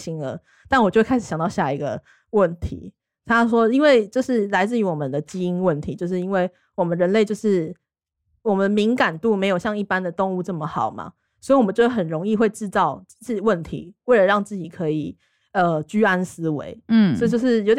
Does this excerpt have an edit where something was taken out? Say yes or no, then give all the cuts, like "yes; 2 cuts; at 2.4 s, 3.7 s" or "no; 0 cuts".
no; 0 cuts